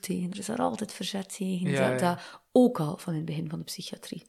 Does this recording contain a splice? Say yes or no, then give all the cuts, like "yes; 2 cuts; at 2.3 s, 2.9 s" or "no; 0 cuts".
no; 0 cuts